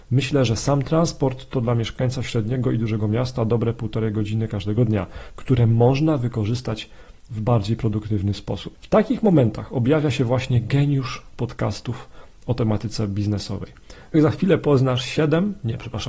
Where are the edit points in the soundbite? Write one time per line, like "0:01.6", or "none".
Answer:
0:08.7
0:14.1

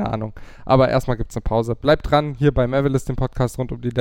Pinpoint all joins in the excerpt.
none

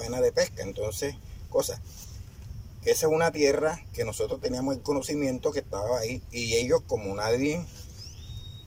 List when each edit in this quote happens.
none

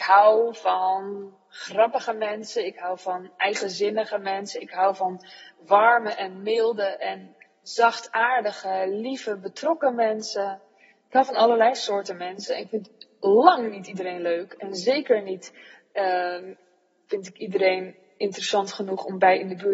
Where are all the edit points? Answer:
none

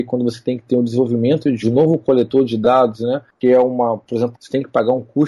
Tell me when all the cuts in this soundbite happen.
0:04.4

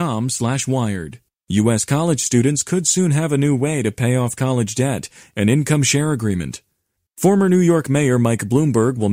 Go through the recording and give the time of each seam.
0:01.3
0:07.1

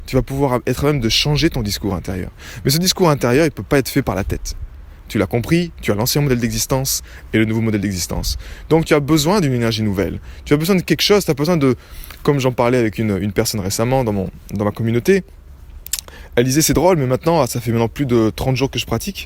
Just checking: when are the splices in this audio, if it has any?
none

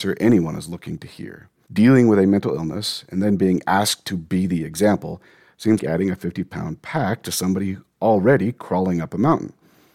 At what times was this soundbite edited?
0:01.7
0:05.8

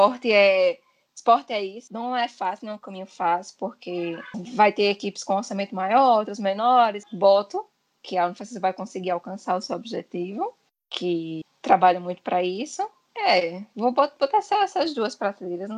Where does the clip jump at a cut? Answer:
0:07.0
0:13.1

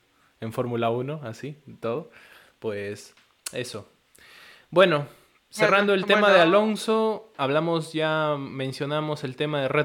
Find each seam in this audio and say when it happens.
none

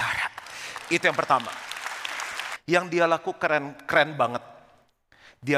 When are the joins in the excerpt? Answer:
0:02.6

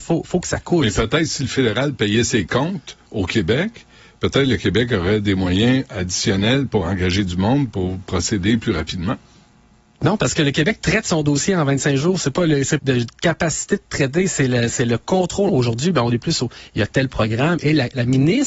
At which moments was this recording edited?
0:12.8
0:15.5

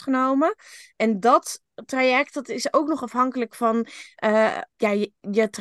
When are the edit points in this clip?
0:04.7

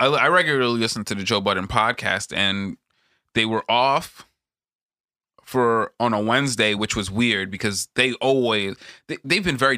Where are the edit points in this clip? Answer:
none

